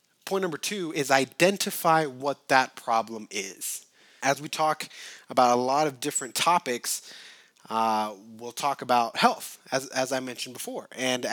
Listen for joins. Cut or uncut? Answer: cut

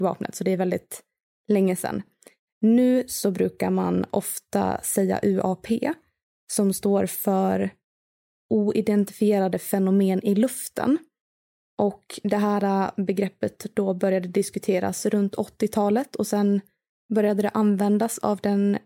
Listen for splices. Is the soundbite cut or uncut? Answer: uncut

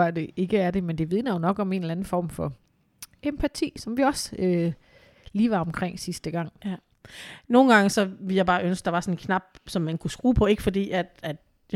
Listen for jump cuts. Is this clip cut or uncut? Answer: uncut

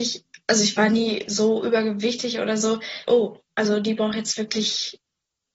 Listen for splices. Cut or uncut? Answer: cut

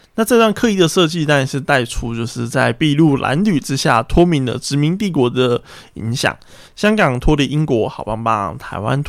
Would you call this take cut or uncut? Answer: uncut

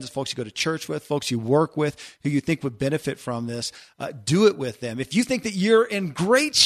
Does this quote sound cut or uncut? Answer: uncut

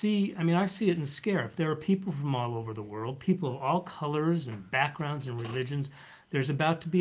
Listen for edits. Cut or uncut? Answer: uncut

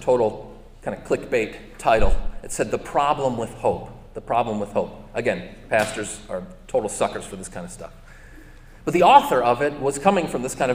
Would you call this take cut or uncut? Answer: uncut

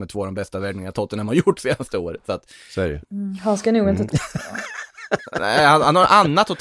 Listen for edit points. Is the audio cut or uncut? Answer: cut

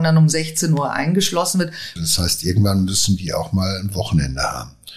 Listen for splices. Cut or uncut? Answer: cut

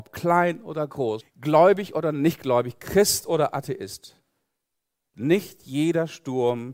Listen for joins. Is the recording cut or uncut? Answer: cut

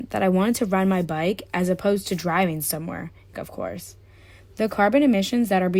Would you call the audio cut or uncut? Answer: cut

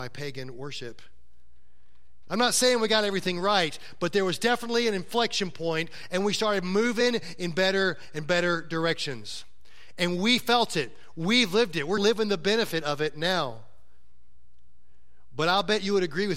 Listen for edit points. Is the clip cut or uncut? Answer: cut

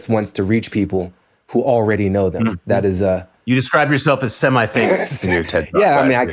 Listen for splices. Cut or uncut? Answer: uncut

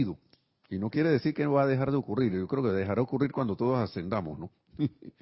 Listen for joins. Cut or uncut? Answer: uncut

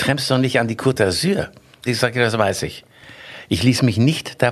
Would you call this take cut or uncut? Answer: cut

